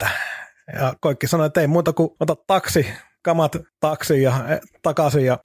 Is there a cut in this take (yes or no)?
no